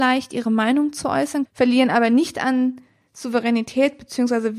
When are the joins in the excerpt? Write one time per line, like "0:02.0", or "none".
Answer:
0:01.4